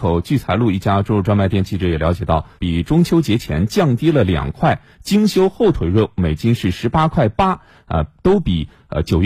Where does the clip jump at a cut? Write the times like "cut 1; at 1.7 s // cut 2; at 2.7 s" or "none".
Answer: cut 1; at 2.6 s